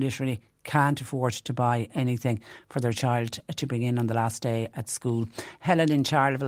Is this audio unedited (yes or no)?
yes